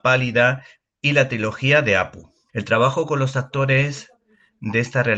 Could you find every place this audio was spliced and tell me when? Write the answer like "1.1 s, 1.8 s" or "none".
2.5 s